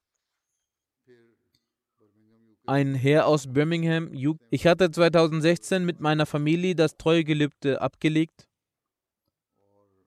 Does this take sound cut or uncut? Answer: cut